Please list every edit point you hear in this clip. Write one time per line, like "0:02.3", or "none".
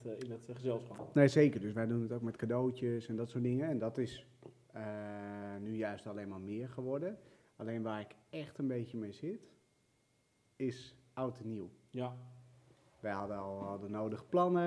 none

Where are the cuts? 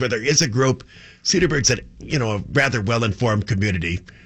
none

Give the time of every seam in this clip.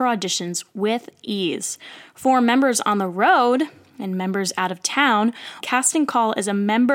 0:05.6

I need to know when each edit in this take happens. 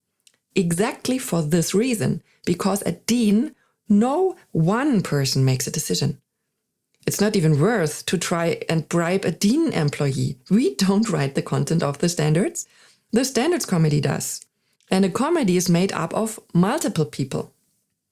none

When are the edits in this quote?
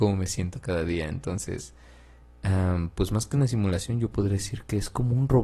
none

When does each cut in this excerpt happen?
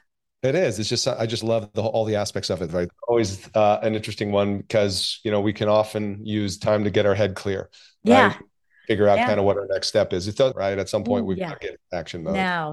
0:02.9
0:10.5

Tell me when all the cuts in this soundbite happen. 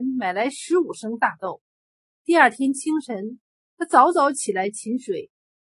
none

